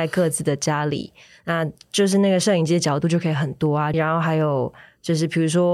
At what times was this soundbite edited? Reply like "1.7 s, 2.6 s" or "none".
3.9 s